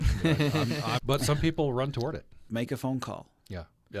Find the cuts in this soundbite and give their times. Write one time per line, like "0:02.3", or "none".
0:01.0
0:02.5